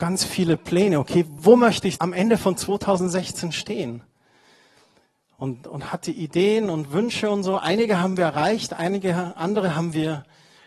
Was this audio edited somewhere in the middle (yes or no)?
no